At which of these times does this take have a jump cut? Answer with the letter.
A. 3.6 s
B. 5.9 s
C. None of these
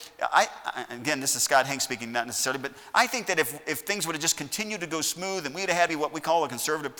B